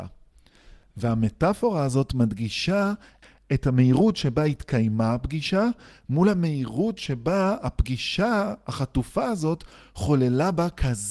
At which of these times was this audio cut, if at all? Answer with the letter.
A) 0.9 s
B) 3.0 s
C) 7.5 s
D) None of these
D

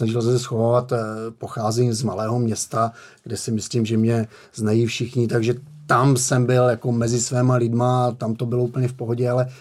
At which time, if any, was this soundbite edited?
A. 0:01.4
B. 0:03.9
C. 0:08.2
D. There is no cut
C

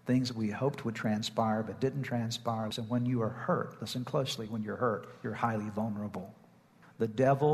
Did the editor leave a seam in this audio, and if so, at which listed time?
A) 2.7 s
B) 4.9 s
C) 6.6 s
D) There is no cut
A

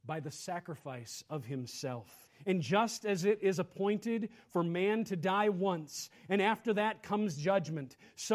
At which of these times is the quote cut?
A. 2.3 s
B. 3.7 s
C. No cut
A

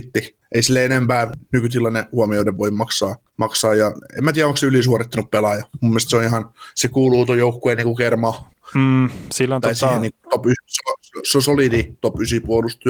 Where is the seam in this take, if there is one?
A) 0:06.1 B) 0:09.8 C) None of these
C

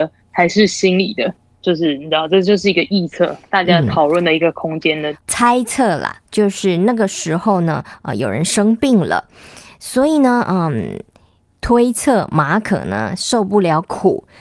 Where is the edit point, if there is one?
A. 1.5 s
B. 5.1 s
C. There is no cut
B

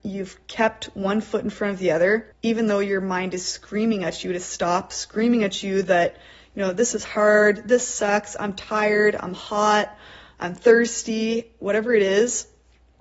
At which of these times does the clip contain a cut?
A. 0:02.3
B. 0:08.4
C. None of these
A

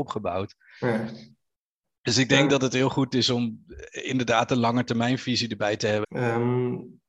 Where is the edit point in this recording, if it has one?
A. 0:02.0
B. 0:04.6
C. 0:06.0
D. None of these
C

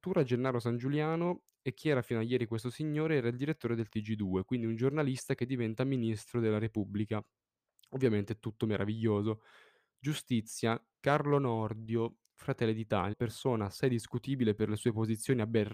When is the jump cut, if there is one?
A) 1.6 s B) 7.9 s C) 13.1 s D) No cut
C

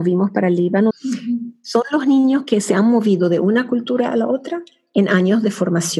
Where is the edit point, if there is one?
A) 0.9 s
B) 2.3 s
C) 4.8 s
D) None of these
A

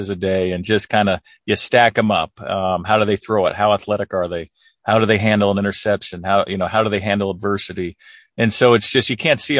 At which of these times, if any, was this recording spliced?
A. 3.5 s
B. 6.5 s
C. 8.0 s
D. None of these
D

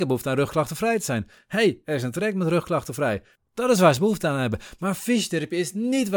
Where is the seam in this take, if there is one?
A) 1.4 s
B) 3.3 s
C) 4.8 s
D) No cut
B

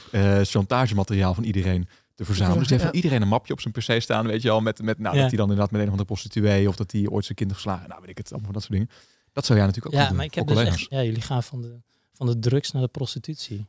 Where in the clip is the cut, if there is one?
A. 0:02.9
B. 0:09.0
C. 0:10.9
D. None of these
C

